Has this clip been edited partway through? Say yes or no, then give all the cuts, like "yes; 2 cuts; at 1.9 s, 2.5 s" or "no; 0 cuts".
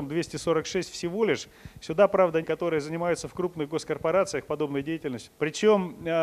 yes; 2 cuts; at 2.4 s, 5.3 s